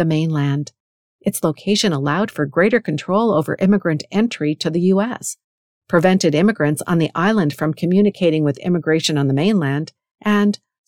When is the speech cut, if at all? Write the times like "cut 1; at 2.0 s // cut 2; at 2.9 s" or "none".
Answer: none